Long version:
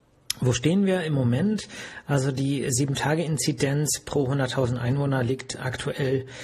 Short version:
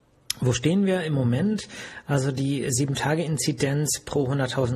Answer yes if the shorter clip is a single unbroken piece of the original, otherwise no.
yes